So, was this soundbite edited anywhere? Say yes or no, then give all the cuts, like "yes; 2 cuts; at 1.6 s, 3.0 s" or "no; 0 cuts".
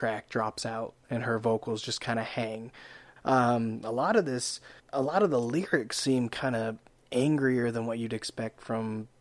yes; 2 cuts; at 3.2 s, 4.8 s